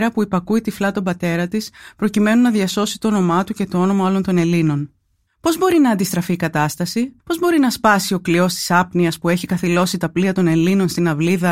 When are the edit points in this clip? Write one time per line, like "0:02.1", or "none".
0:05.3
0:07.2